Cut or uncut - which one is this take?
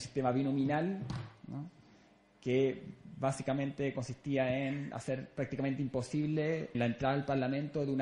cut